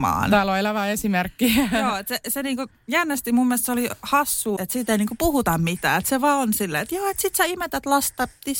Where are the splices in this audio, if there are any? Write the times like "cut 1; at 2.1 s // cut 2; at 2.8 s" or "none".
cut 1; at 4.6 s